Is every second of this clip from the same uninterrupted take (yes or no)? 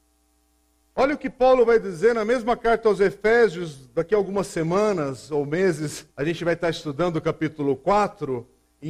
no